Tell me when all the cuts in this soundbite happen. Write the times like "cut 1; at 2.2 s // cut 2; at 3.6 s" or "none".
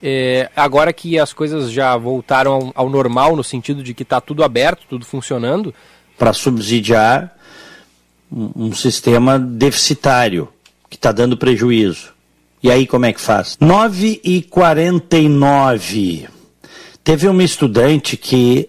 cut 1; at 6.1 s // cut 2; at 13.5 s